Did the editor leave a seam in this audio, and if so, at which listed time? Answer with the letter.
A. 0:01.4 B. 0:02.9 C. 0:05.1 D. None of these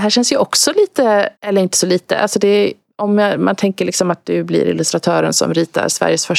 A